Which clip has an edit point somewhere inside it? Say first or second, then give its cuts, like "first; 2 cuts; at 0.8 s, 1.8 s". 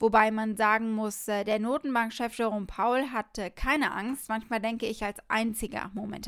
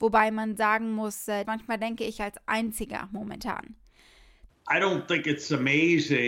second; 2 cuts; at 1.4 s, 4.5 s